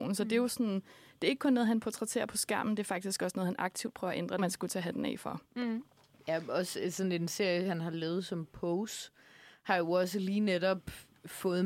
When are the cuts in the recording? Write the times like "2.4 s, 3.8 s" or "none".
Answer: 4.4 s